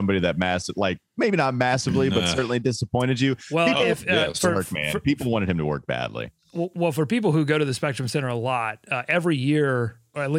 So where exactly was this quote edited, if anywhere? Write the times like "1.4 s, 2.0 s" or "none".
none